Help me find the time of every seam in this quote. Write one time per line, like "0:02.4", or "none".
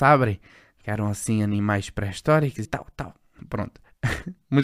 0:02.6